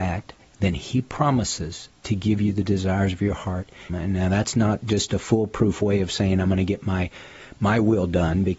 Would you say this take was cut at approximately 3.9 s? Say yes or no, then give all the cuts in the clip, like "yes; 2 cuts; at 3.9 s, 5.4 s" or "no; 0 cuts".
yes; 1 cut; at 3.9 s